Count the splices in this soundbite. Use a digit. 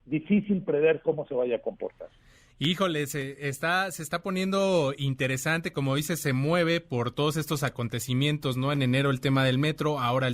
0